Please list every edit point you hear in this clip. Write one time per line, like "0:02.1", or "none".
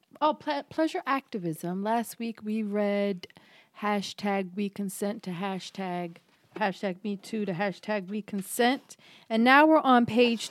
0:06.5